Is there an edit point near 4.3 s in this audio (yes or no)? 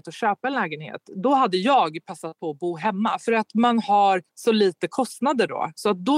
yes